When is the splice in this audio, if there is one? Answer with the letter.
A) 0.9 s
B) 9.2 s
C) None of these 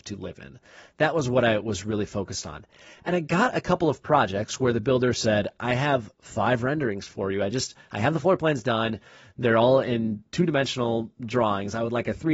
C